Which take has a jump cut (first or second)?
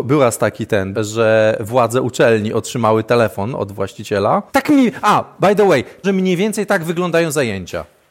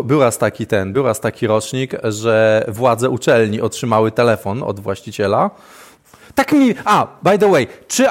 first